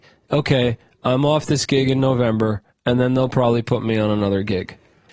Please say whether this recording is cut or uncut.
uncut